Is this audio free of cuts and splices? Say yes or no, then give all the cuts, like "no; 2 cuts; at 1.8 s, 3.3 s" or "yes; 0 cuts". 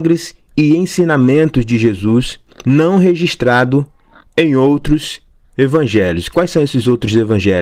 yes; 0 cuts